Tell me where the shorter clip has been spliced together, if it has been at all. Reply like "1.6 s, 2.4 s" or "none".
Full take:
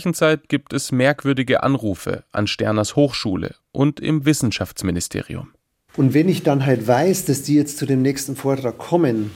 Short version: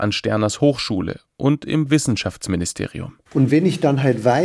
3.2 s